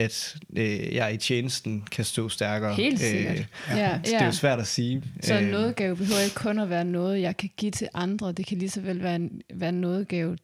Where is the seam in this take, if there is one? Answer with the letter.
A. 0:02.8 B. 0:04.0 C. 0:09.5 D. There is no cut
B